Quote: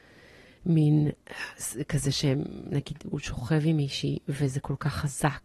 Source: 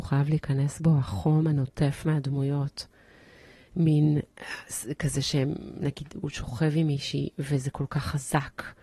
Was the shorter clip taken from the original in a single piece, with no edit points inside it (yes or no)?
yes